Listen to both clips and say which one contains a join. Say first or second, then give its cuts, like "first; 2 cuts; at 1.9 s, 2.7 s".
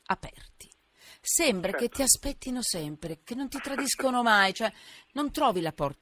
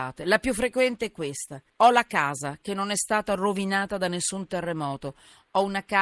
second; 1 cut; at 1.7 s